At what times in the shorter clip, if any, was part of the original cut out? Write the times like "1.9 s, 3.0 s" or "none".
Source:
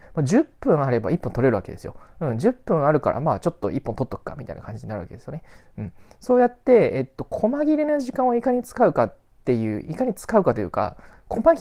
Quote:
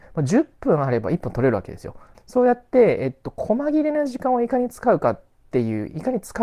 2.1 s